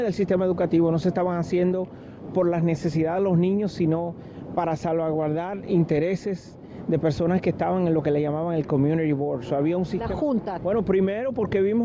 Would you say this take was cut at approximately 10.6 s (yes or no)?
yes